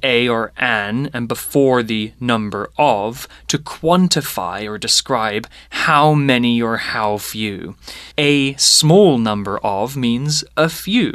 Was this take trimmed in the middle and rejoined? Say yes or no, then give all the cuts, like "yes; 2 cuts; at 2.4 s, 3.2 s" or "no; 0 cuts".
yes; 1 cut; at 8.1 s